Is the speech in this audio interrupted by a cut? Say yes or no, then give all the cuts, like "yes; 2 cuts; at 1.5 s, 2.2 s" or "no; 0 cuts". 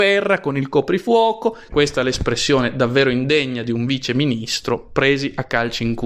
yes; 1 cut; at 1.7 s